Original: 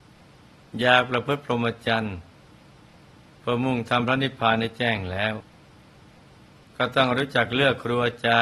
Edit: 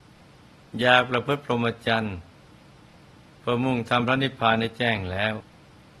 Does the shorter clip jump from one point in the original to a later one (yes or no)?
no